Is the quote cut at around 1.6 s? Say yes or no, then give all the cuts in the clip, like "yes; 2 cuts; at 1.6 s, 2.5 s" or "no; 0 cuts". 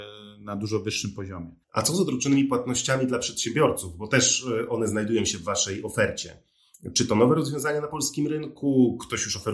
yes; 1 cut; at 1.6 s